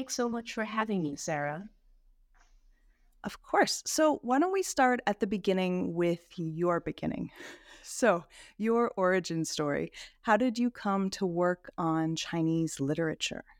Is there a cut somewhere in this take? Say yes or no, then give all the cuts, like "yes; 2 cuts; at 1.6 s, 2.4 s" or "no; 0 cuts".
no; 0 cuts